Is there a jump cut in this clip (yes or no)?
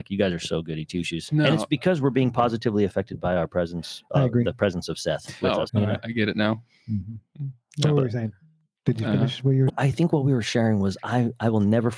yes